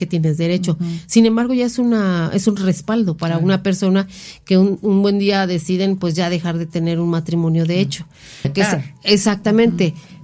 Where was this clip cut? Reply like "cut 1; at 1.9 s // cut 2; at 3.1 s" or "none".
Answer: cut 1; at 8.4 s